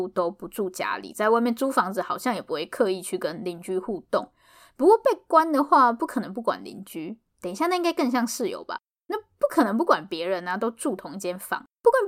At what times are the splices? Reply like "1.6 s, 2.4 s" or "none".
none